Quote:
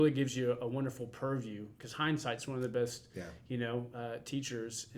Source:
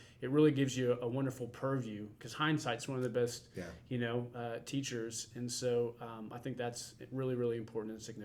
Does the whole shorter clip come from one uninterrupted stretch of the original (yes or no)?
yes